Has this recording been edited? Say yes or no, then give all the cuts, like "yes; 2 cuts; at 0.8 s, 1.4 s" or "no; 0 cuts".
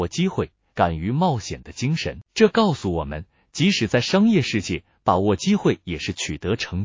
yes; 1 cut; at 2.2 s